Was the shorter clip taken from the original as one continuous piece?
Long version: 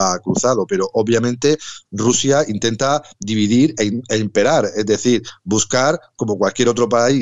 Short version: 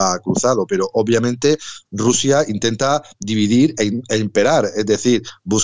yes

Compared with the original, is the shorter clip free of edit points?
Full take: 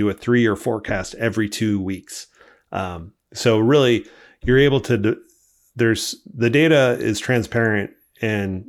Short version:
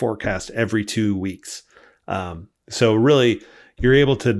yes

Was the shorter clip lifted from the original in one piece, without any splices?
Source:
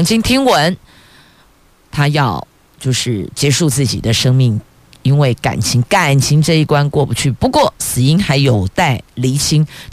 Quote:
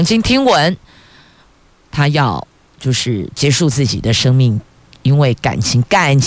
yes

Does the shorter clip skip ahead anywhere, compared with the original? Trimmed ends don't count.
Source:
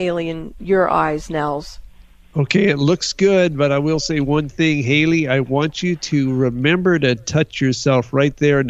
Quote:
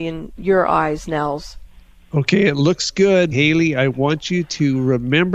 yes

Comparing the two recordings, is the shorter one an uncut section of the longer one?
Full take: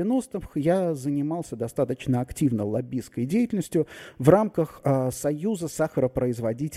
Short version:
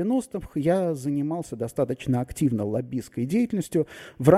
yes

